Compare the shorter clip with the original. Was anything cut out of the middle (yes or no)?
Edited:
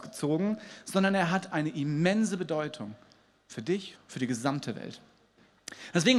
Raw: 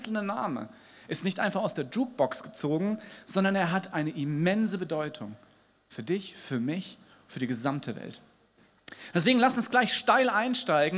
yes